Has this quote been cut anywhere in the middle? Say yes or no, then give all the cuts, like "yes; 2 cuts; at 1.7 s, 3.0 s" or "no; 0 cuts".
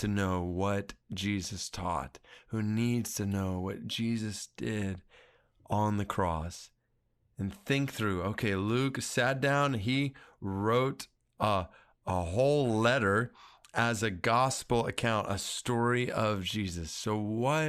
no; 0 cuts